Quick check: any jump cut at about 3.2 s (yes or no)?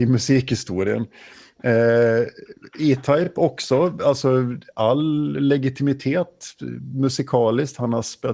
no